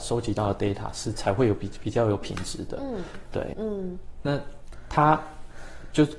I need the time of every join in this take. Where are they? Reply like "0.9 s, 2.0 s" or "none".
1.8 s, 3.5 s